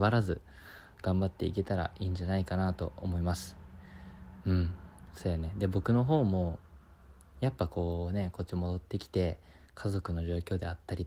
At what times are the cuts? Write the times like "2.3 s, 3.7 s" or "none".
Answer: none